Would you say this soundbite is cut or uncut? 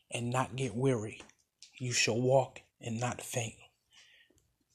cut